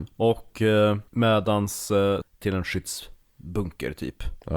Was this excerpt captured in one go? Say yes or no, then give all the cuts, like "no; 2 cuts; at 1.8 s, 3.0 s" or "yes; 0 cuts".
no; 2 cuts; at 1.1 s, 2.2 s